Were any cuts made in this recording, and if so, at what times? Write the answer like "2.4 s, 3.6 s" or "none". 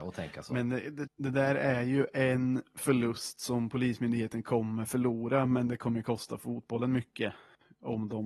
1.1 s